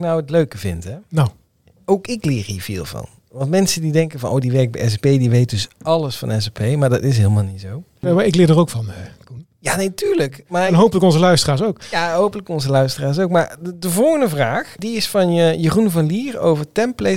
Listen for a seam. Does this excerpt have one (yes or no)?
no